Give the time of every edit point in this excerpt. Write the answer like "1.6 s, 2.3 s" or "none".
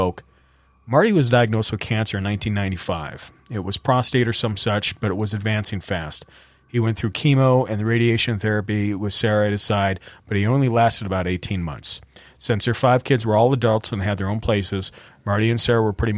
none

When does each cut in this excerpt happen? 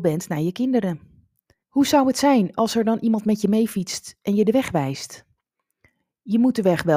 1.6 s

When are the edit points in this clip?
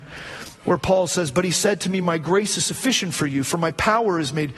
none

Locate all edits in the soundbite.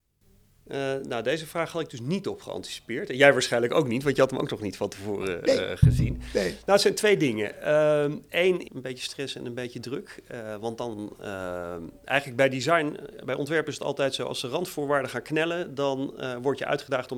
8.7 s

